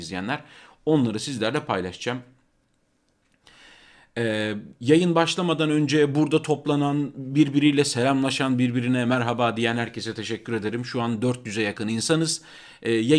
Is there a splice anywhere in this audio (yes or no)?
no